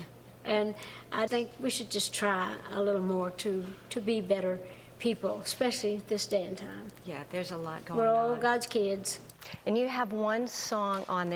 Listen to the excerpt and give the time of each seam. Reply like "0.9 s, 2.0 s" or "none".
1.3 s